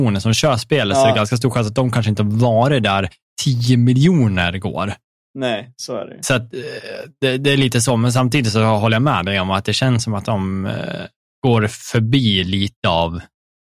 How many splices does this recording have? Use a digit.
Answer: 0